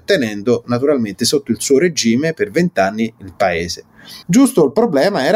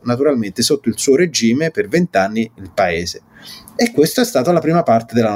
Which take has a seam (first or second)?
first